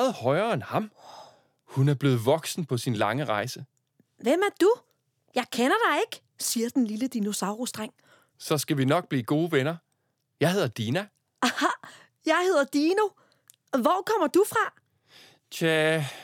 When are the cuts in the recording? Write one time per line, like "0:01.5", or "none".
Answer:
none